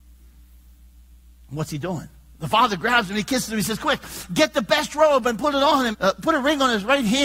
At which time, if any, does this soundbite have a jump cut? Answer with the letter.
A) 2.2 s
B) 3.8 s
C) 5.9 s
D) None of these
C